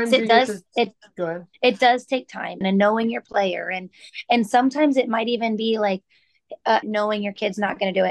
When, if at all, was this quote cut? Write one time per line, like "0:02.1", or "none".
0:02.6
0:06.8